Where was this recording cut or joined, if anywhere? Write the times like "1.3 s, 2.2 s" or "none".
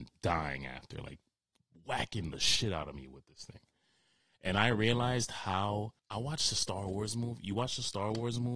6.0 s